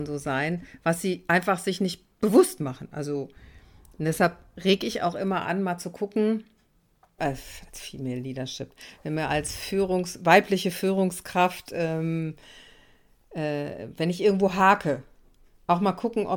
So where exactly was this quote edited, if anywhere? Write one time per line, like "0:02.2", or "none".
0:07.2